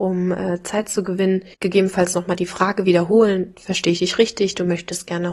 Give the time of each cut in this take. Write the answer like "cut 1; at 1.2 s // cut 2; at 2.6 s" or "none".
cut 1; at 1.5 s